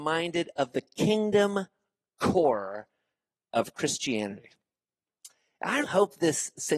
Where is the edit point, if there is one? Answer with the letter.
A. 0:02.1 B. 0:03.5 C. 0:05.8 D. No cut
C